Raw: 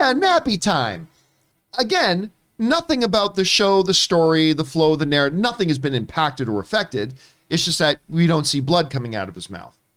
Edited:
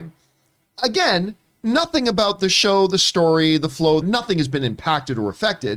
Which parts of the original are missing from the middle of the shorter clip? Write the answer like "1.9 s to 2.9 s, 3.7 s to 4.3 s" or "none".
5.0 s to 5.3 s